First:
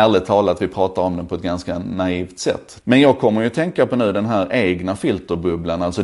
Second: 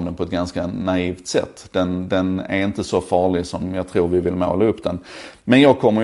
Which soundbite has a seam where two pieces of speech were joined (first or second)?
first